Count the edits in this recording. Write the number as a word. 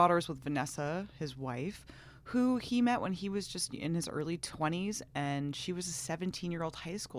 zero